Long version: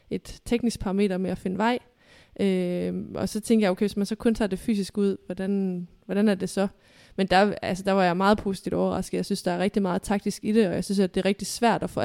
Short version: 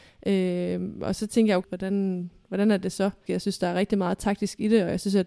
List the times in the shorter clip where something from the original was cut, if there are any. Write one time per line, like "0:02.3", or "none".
0:01.6
0:03.3